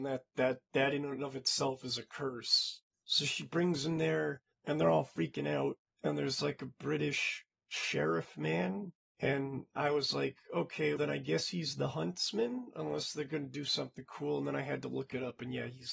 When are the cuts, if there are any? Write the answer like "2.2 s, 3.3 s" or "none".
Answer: 11.0 s